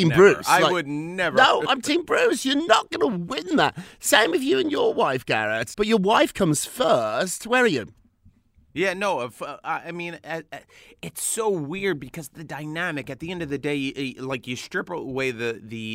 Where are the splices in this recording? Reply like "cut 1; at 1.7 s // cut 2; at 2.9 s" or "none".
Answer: cut 1; at 5.7 s